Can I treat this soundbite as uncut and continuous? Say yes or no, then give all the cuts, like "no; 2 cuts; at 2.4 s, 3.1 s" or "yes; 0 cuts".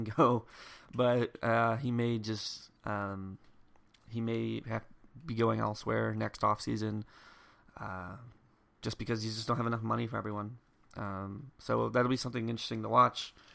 yes; 0 cuts